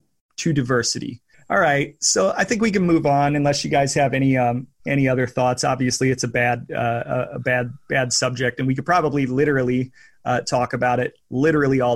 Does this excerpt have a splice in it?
yes; 1 cut; at 1.3 s

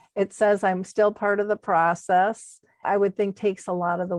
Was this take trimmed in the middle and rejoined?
yes; 1 cut; at 2.8 s

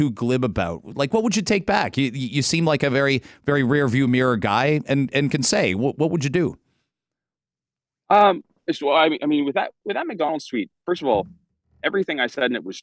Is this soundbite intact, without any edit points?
yes; 0 cuts

